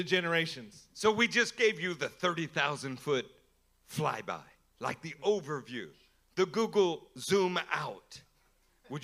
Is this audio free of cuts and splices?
yes; 0 cuts

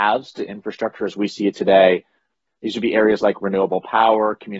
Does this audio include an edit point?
yes; 1 cut; at 2.5 s

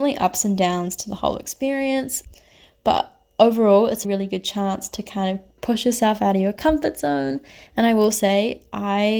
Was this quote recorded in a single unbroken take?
no; 2 cuts; at 4.0 s, 7.7 s

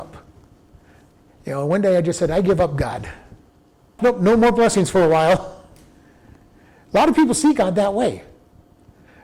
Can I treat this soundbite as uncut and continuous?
no; 1 cut; at 4.0 s

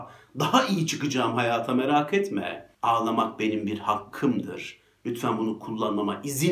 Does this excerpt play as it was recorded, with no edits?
no; 1 cut; at 2.7 s

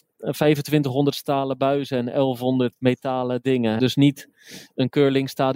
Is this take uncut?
no; 2 cuts; at 2.7 s, 3.8 s

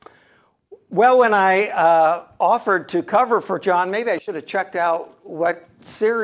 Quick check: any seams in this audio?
no; 0 cuts

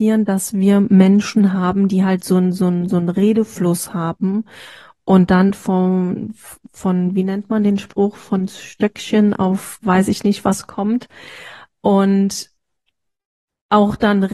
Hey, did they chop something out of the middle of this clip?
no; 0 cuts

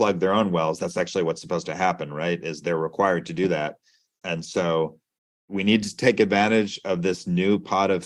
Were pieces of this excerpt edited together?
yes; 1 cut; at 4.2 s

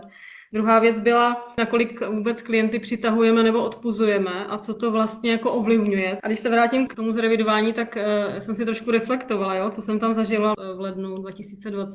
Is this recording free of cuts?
no; 1 cut; at 6.2 s

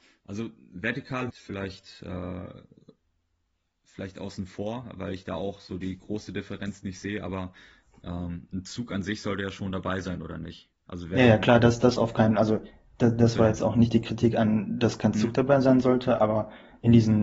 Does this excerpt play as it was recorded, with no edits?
no; 1 cut; at 1.3 s

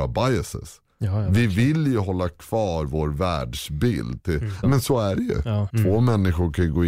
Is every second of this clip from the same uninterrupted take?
no; 2 cuts; at 4.6 s, 5.7 s

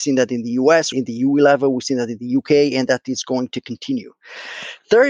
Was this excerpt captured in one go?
no; 1 cut; at 0.9 s

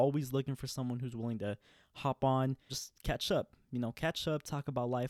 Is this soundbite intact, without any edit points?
yes; 0 cuts

